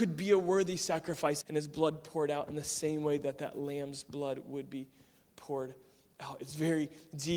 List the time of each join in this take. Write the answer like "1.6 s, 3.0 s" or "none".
1.4 s